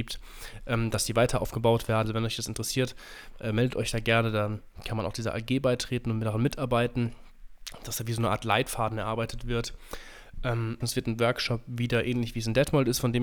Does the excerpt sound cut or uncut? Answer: cut